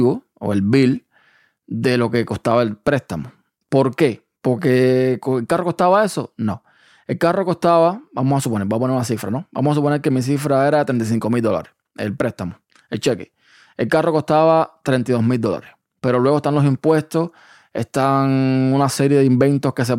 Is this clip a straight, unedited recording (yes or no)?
no